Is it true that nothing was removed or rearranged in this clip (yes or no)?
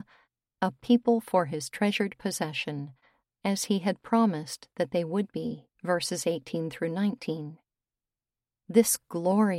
no